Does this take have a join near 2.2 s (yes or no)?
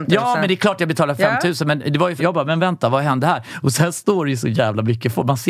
yes